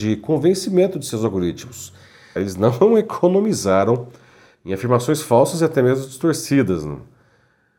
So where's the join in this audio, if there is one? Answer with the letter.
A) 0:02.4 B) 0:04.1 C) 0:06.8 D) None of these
A